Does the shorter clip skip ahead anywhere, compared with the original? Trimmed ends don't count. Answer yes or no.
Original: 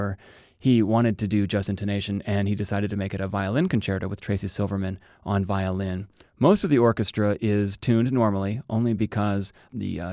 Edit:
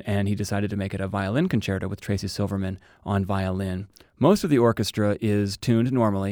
no